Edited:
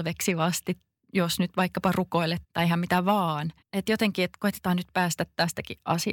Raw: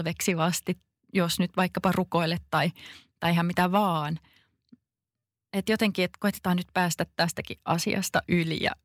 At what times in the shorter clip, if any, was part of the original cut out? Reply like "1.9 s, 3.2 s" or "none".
2.4 s, 3.6 s